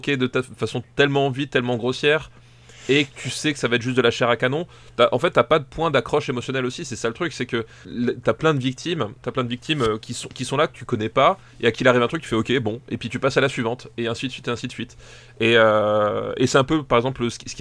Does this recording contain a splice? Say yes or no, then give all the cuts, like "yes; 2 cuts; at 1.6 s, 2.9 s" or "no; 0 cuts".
yes; 1 cut; at 10.0 s